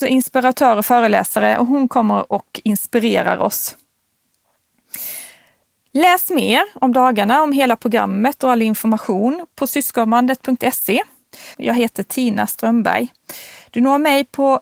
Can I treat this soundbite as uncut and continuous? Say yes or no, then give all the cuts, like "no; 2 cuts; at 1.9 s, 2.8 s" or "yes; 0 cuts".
no; 1 cut; at 11.5 s